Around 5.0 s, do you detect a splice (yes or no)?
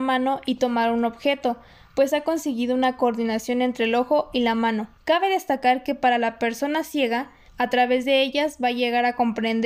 yes